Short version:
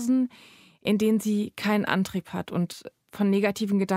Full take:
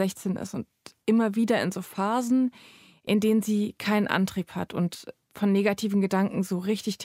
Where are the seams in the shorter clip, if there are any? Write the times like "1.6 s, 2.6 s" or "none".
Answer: none